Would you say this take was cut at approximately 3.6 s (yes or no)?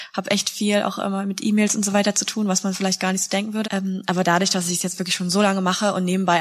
yes